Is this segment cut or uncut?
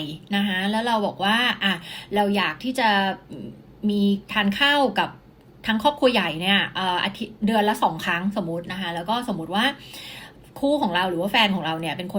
uncut